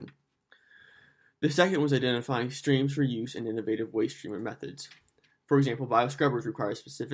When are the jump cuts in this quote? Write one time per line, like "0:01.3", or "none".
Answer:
none